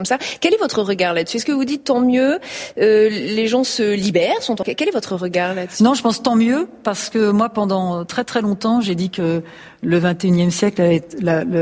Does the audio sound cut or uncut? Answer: cut